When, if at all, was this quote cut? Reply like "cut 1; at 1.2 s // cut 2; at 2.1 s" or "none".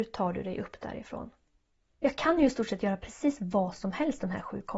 cut 1; at 1.9 s